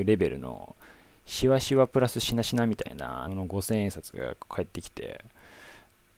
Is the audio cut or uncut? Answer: cut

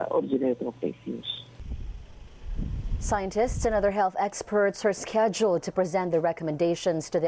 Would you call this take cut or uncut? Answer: uncut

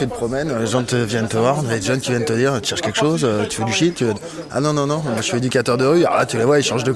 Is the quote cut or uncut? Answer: uncut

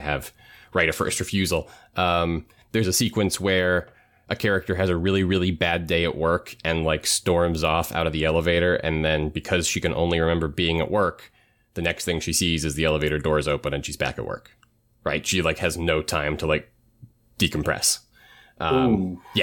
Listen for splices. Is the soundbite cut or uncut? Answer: uncut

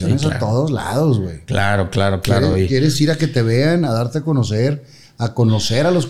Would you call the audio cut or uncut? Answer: uncut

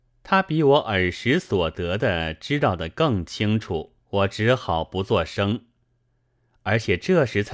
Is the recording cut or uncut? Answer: cut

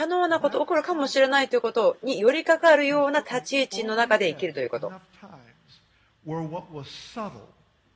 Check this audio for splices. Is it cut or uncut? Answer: uncut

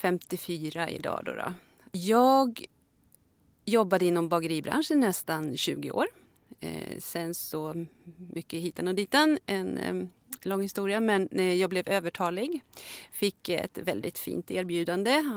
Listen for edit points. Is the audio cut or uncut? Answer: uncut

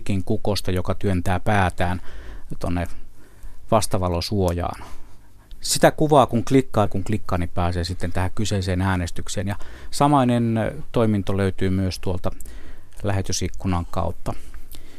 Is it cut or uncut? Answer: cut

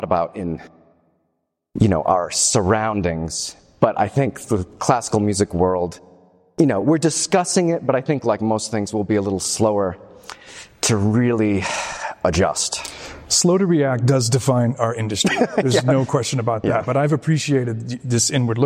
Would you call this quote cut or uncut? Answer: uncut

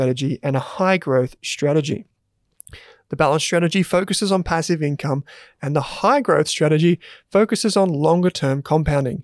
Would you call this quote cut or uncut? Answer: uncut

